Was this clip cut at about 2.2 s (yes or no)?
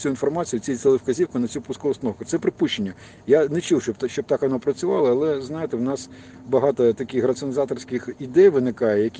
no